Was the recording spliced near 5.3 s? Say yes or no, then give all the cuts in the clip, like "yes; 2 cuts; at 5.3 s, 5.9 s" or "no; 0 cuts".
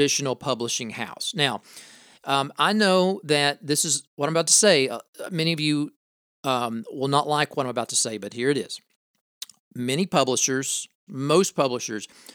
no; 1 cut; at 11.1 s